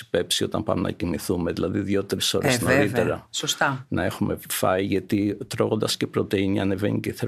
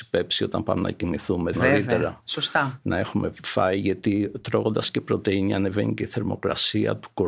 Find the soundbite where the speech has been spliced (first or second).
second